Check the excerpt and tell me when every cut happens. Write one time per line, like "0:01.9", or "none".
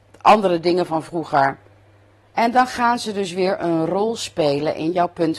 0:02.3